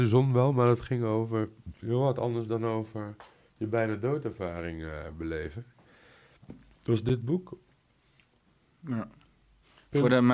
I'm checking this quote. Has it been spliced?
no; 0 cuts

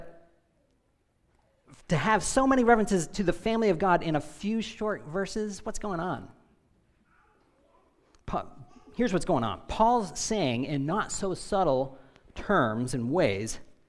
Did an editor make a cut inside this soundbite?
no; 0 cuts

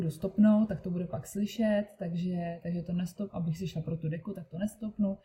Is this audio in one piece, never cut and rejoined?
yes; 0 cuts

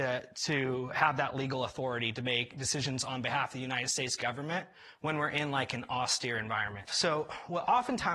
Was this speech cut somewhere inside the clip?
yes; 1 cut; at 6.9 s

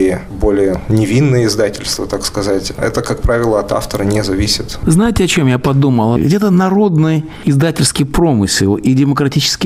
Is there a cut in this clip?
yes; 1 cut; at 6.2 s

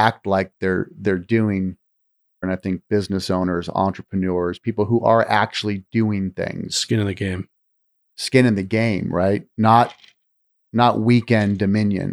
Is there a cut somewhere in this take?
yes; 1 cut; at 2.4 s

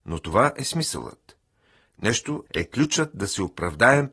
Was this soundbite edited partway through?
yes; 1 cut; at 2.5 s

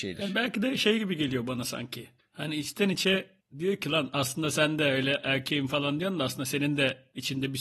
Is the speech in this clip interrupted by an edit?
no; 0 cuts

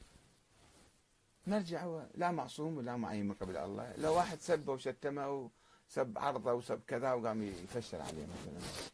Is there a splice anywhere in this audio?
no; 0 cuts

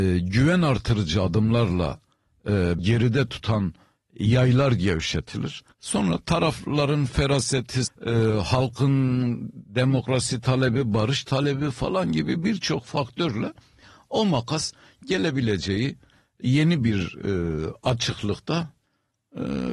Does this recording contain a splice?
yes; 3 cuts; at 2.8 s, 5.7 s, 7.9 s

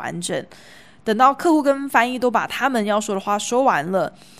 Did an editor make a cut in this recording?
no; 0 cuts

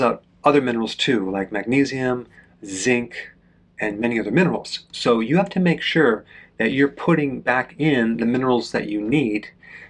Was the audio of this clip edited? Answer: no; 0 cuts

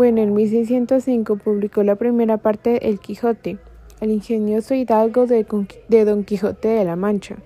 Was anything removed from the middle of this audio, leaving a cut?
no; 0 cuts

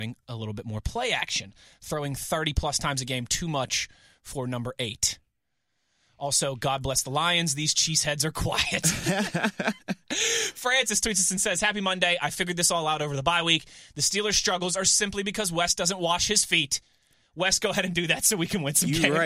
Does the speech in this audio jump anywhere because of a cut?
no; 0 cuts

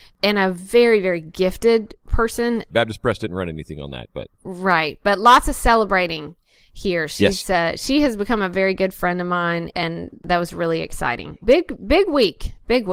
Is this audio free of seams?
no; 2 cuts; at 2.7 s, 11.4 s

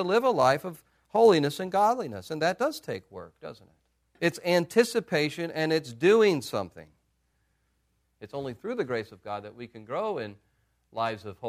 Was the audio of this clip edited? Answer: yes; 2 cuts; at 4.2 s, 8.0 s

